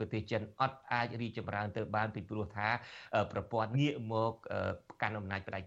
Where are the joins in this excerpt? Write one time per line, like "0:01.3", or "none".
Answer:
0:03.7